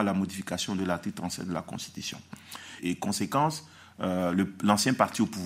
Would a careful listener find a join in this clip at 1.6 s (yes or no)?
no